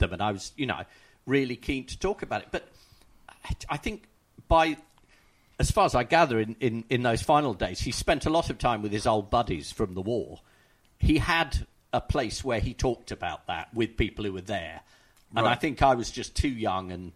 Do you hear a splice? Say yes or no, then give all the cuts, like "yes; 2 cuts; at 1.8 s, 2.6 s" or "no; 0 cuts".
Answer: no; 0 cuts